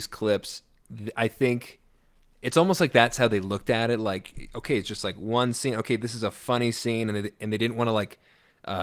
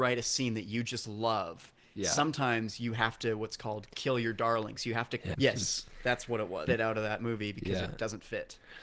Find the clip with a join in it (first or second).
second